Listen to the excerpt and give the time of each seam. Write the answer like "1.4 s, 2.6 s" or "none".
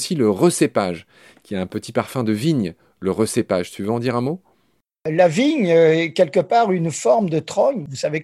none